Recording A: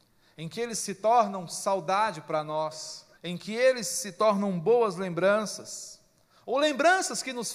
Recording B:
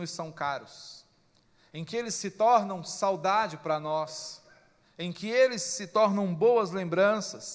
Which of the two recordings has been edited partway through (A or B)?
A